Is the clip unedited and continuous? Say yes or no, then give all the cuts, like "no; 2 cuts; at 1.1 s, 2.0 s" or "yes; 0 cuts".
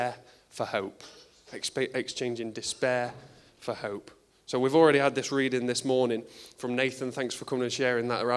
yes; 0 cuts